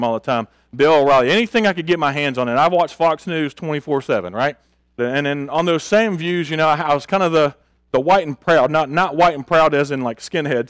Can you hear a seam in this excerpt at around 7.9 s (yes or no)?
no